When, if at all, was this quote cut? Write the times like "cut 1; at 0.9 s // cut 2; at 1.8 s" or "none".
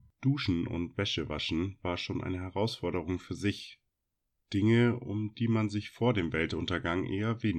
none

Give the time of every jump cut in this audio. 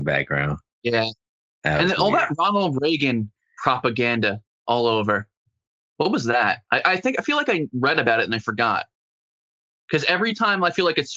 none

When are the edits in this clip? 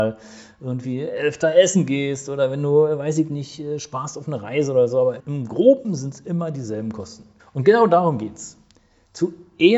cut 1; at 5.2 s // cut 2; at 7.4 s

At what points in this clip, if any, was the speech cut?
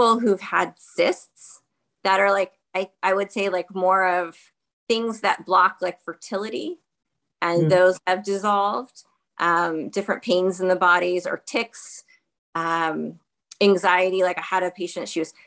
none

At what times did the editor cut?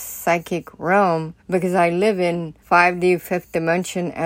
cut 1; at 1.4 s // cut 2; at 2.6 s

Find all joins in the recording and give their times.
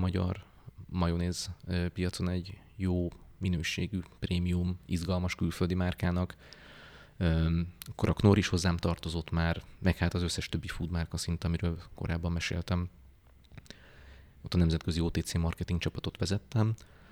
cut 1; at 14.4 s

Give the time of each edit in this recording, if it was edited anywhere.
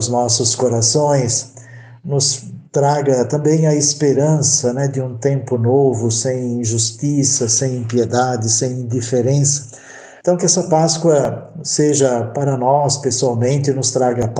cut 1; at 10.2 s

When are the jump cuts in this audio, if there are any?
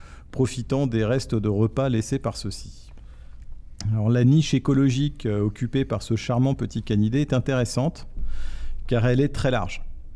none

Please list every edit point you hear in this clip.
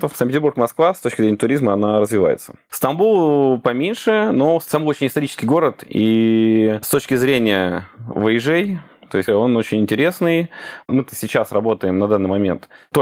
cut 1; at 2.7 s // cut 2; at 9.3 s // cut 3; at 10.8 s

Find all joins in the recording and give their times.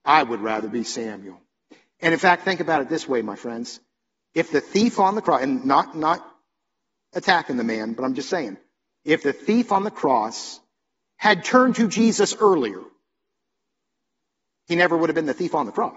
none

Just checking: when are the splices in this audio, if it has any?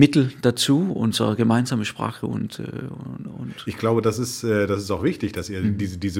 none

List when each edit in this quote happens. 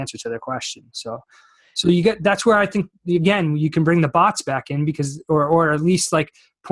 none

